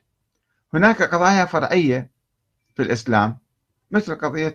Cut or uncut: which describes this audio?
uncut